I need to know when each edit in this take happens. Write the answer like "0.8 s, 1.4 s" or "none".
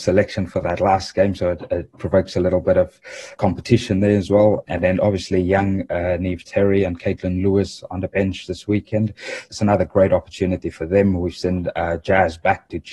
none